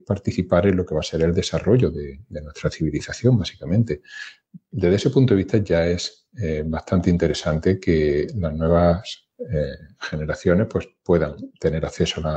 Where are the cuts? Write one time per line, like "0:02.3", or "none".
none